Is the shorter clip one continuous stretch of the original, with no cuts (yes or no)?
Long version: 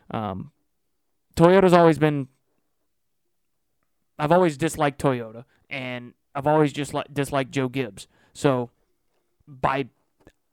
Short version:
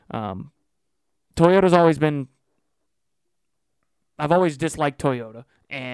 yes